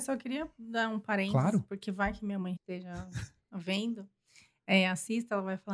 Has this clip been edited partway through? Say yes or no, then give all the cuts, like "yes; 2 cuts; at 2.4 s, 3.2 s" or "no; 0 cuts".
yes; 1 cut; at 2.6 s